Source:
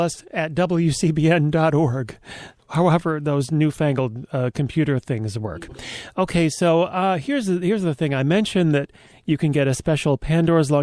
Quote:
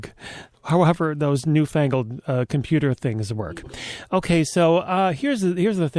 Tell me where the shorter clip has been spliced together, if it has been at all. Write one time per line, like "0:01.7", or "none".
none